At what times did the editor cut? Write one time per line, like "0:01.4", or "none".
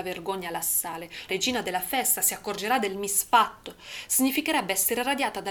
0:01.3